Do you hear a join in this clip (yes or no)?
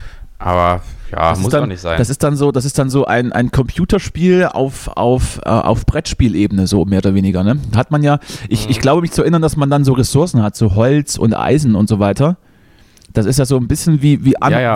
no